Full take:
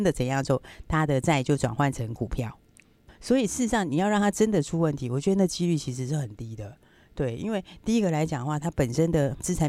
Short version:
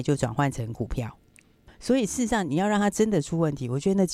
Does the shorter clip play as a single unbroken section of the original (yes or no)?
yes